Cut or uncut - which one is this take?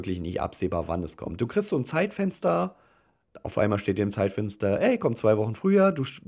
uncut